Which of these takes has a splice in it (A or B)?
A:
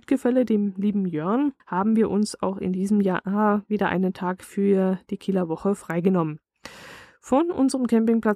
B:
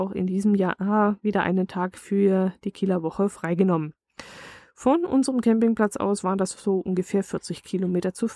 A